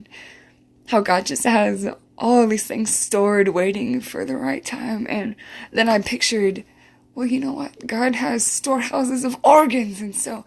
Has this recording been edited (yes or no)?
no